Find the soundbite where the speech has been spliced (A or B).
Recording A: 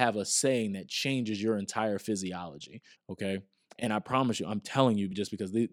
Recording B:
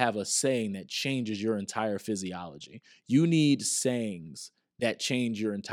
A